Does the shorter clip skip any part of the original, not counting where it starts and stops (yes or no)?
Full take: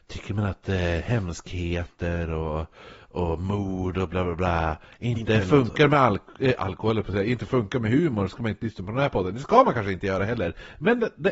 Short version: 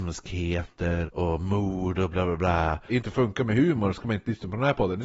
yes